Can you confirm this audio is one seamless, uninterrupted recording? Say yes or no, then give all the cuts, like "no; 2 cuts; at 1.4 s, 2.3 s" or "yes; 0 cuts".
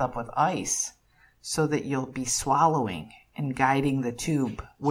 yes; 0 cuts